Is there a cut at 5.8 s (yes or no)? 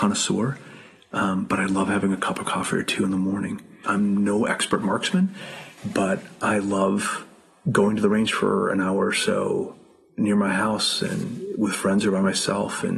yes